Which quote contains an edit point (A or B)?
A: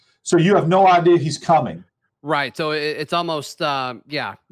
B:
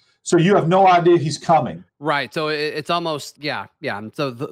B